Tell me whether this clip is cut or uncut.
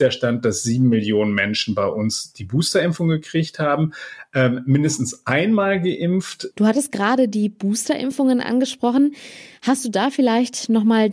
cut